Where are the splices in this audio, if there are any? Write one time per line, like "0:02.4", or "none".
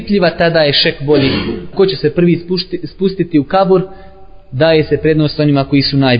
0:01.7